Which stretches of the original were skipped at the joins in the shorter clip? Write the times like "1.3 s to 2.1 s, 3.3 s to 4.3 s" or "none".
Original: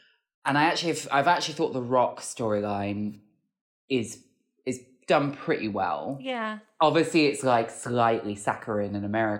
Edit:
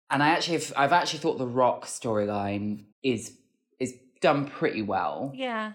3.3 s to 3.8 s